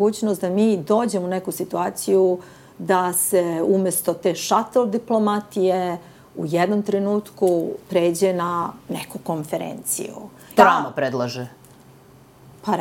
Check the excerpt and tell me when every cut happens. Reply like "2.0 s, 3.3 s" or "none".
10.6 s